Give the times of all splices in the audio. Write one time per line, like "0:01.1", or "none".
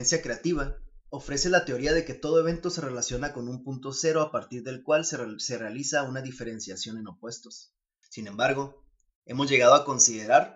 0:08.0